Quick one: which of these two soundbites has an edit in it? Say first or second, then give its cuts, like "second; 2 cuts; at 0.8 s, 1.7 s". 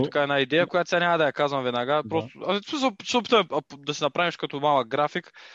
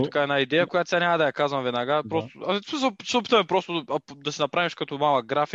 first; 1 cut; at 3.5 s